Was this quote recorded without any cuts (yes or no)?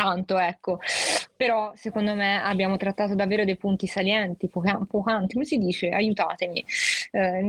yes